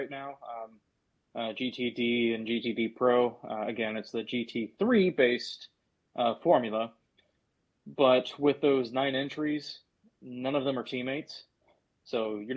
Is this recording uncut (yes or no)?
yes